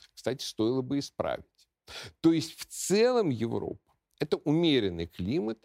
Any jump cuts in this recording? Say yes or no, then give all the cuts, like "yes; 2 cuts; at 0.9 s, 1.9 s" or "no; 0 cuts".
no; 0 cuts